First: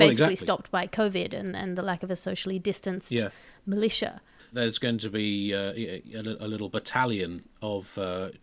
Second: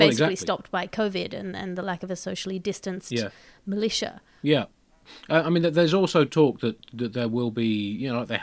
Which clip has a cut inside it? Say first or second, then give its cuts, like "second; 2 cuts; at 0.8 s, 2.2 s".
first; 1 cut; at 4.4 s